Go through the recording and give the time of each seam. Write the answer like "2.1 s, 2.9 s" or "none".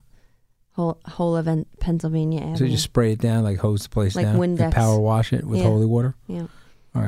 none